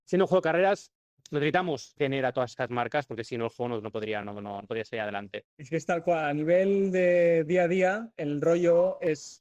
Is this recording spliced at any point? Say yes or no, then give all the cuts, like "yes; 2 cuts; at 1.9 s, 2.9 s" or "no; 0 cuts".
no; 0 cuts